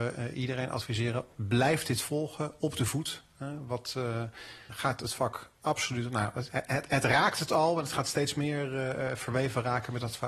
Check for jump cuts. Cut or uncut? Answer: cut